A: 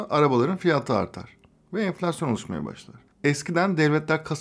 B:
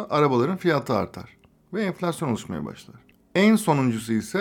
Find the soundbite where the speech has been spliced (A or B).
A